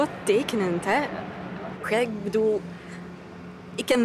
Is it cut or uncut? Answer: cut